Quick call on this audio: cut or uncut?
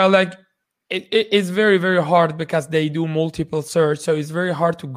uncut